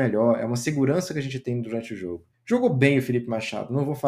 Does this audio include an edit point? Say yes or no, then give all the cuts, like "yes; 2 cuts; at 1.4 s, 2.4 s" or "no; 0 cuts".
yes; 1 cut; at 2.3 s